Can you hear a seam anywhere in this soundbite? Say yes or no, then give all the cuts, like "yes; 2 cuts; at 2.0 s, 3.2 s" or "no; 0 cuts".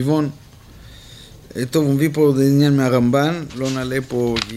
no; 0 cuts